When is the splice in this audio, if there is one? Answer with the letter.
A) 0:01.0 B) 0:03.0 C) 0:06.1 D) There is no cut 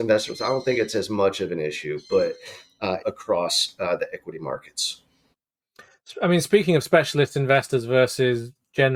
B